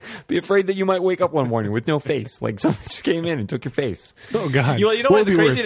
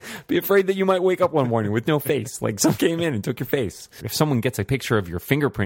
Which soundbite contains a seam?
second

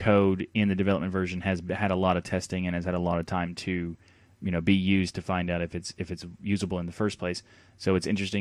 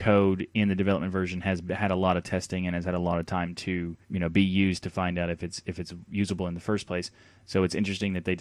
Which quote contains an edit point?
second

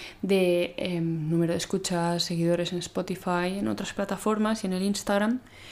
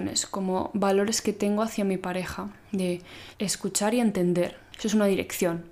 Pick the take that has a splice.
second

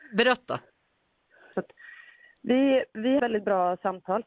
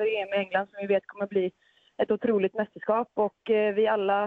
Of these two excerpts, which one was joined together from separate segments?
first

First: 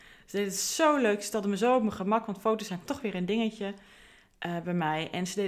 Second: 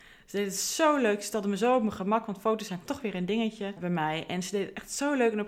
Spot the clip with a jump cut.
second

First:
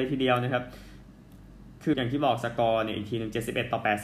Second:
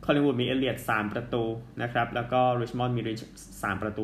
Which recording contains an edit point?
first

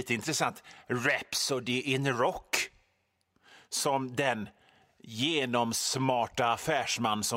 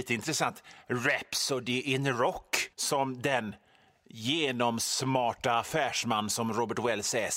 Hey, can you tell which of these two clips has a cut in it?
second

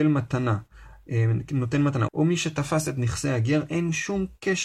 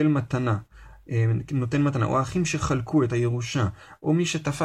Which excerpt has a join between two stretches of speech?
first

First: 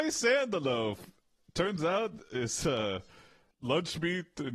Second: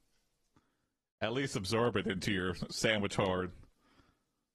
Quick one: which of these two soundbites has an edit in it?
first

